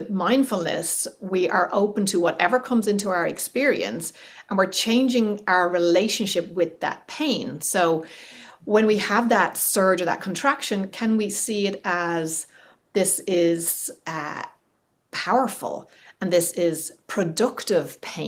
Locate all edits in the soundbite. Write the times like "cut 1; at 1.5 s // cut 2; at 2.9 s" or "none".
none